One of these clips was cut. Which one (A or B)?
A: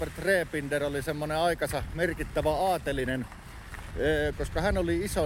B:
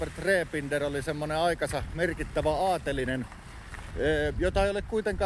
A